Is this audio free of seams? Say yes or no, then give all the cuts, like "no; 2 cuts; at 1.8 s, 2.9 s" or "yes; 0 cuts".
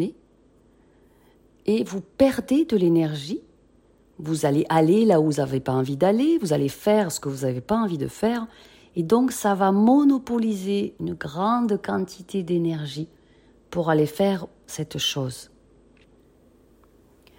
yes; 0 cuts